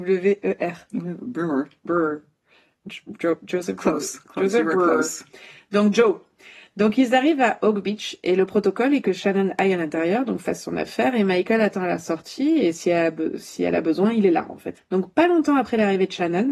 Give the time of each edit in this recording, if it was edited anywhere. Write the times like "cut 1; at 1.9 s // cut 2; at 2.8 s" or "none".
cut 1; at 14.8 s